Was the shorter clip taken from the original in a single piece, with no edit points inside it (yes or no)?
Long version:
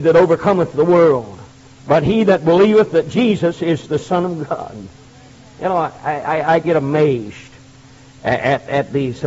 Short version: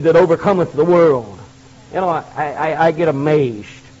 no